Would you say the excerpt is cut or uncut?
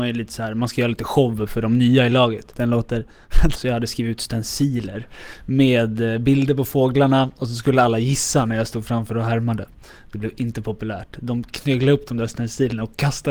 cut